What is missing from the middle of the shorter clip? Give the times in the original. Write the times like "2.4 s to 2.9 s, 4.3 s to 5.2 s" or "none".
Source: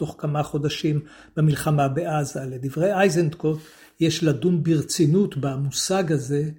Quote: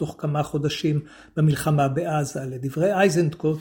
none